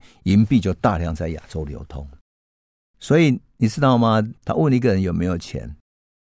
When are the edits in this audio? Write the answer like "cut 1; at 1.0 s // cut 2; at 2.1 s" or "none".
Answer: cut 1; at 4.4 s